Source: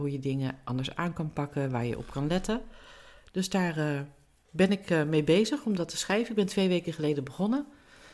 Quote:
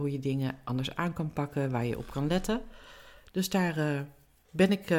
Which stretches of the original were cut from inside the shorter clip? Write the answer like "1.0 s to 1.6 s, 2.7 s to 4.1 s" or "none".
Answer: none